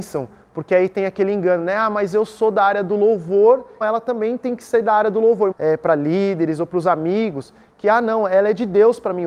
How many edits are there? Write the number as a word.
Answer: two